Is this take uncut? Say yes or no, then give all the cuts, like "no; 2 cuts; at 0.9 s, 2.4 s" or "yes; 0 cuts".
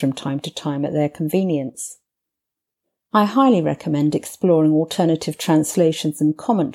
no; 1 cut; at 3.1 s